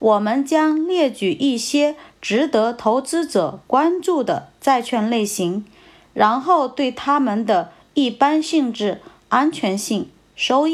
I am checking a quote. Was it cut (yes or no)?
no